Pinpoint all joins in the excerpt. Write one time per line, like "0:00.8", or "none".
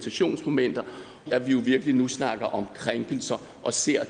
0:01.3